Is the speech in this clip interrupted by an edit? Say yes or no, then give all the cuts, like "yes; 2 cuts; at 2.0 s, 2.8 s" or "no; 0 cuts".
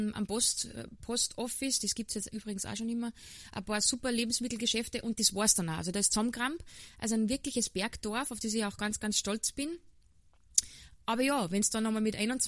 no; 0 cuts